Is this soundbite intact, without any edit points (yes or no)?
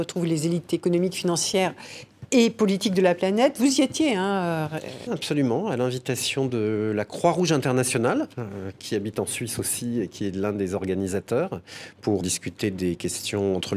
no